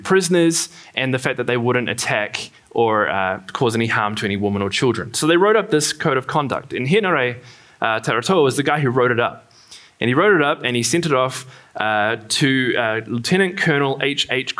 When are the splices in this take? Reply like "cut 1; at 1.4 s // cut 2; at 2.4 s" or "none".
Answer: none